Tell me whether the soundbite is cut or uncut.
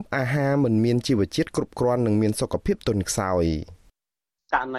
uncut